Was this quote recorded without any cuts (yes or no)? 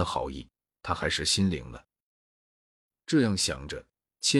yes